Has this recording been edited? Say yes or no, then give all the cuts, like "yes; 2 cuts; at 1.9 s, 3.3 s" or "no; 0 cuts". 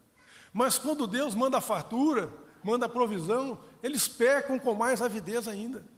yes; 1 cut; at 2.6 s